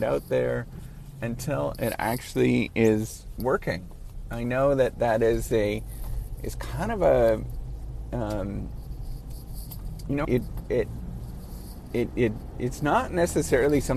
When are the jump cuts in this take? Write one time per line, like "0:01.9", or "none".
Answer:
0:10.2